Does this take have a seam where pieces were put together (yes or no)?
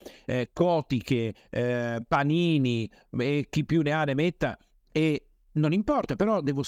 no